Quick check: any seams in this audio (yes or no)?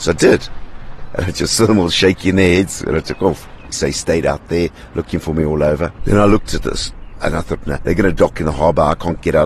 yes